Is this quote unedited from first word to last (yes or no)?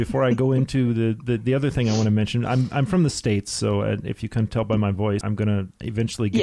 no